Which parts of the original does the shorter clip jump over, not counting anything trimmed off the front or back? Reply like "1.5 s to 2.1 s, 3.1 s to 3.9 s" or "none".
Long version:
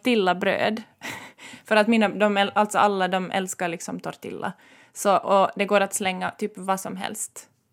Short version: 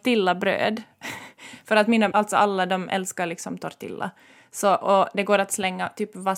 2.1 s to 2.5 s